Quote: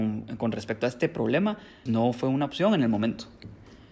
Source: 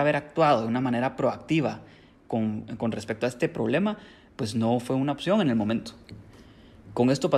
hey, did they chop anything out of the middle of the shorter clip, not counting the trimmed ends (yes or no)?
yes